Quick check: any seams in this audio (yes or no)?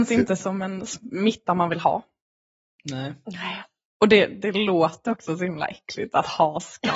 no